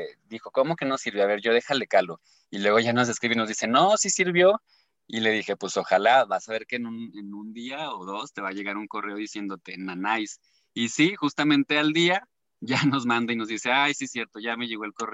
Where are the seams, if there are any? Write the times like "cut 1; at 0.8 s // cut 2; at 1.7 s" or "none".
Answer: none